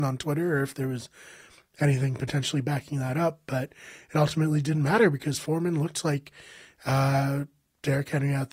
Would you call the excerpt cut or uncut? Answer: uncut